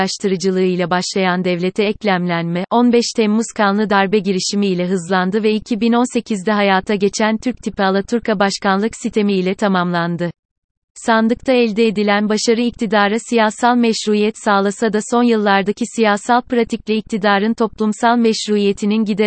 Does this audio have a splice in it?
no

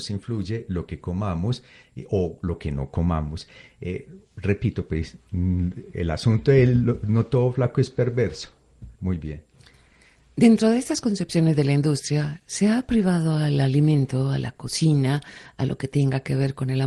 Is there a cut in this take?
yes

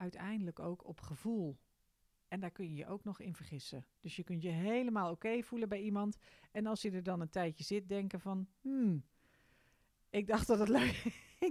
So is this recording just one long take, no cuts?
yes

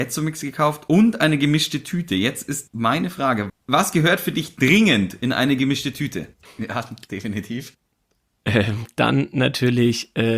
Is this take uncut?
no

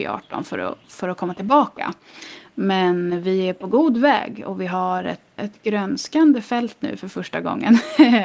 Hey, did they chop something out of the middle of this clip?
yes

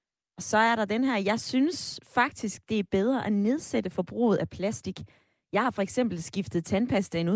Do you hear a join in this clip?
no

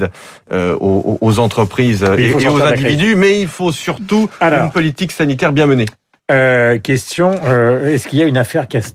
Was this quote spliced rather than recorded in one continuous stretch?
no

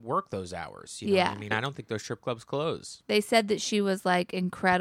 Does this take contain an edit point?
yes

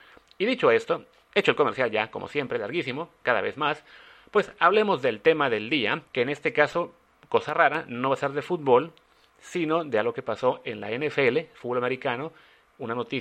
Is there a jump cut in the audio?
yes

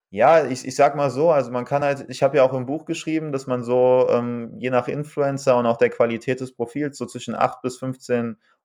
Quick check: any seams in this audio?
no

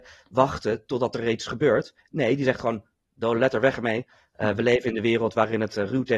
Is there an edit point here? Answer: no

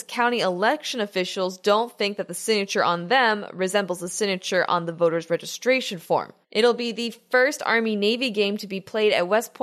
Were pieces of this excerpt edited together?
yes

